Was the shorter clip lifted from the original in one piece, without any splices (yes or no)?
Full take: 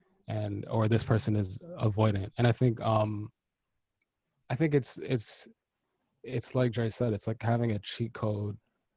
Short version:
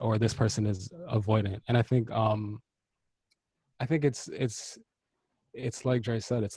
yes